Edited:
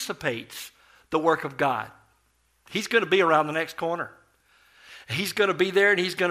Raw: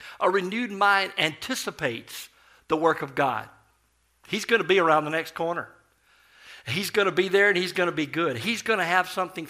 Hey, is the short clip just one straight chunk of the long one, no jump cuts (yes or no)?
yes